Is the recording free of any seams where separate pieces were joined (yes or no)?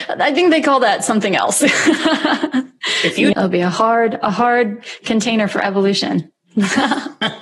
no